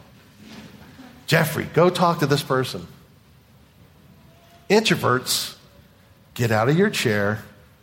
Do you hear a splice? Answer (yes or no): no